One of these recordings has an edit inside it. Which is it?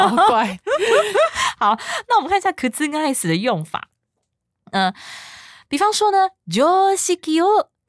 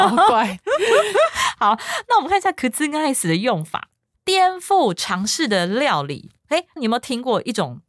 second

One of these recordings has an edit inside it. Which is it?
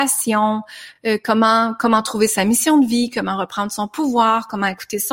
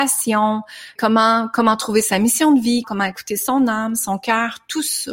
second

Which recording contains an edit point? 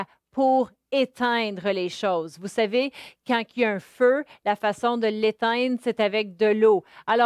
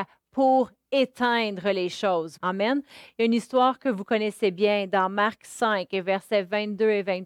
second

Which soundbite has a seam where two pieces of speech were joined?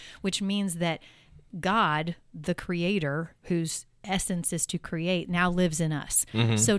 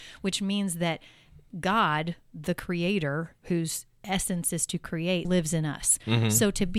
second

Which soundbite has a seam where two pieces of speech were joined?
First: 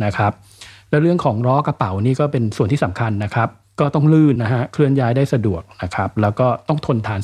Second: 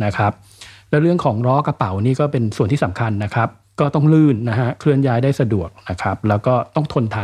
first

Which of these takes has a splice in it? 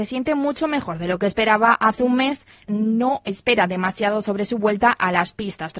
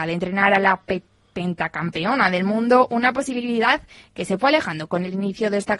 first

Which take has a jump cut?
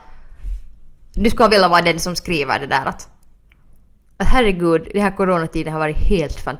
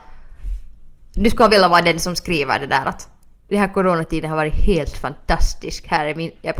second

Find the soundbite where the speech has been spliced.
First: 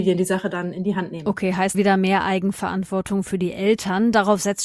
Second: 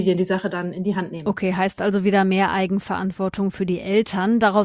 first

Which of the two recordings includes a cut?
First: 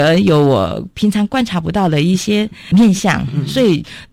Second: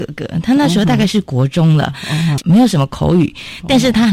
second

